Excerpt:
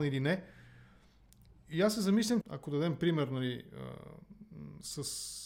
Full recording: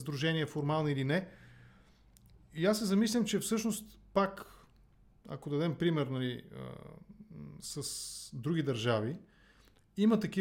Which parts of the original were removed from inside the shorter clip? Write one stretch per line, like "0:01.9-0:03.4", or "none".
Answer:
0:03.3-0:05.2